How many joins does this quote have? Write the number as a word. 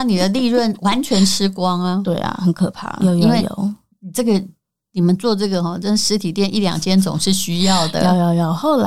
one